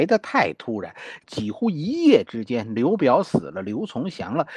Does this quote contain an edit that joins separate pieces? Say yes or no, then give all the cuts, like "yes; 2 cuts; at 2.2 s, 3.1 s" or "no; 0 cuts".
yes; 1 cut; at 1.2 s